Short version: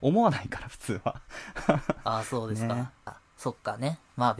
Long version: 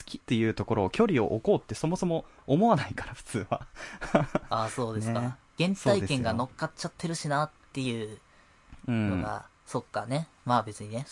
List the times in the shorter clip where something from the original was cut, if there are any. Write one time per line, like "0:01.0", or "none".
0:03.1